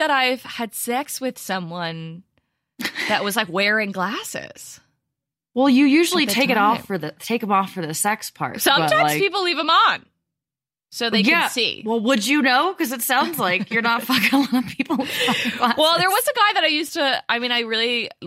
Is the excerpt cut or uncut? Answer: uncut